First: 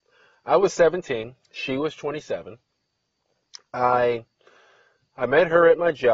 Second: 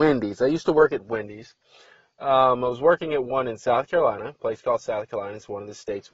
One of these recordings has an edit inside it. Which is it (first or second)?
first